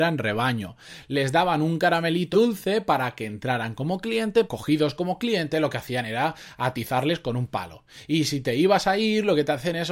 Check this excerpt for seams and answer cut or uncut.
cut